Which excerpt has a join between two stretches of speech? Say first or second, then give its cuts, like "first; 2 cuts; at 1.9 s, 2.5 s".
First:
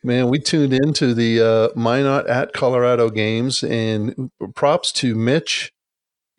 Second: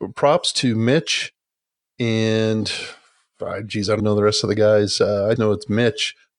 second; 2 cuts; at 4.0 s, 5.4 s